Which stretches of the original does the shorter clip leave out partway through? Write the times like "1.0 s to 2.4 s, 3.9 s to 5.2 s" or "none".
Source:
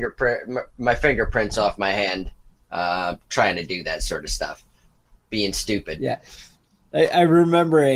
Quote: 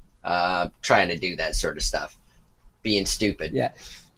none